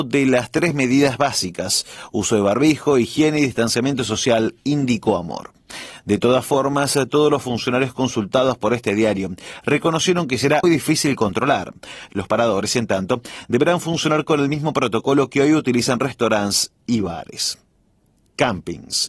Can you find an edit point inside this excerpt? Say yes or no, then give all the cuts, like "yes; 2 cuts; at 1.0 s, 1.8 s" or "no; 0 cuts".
yes; 2 cuts; at 10.6 s, 12.1 s